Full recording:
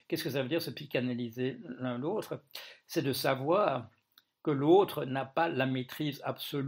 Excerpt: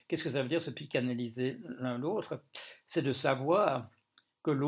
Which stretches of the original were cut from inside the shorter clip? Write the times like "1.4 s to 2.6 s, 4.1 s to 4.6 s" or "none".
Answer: none